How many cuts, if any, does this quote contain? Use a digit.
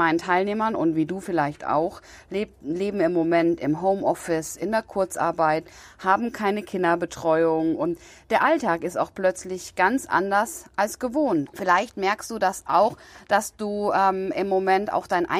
1